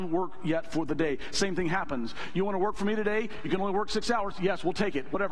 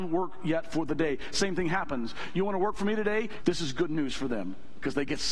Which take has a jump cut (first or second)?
second